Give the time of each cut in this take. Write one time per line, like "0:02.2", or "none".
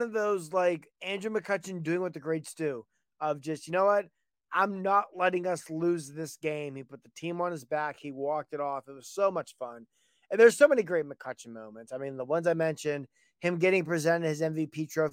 none